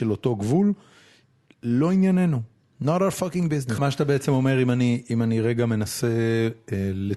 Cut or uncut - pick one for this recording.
cut